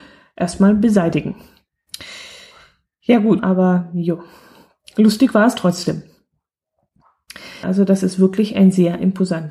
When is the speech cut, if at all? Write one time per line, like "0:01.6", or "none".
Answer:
0:03.4
0:07.6